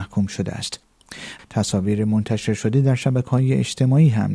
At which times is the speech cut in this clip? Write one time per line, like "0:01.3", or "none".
0:01.4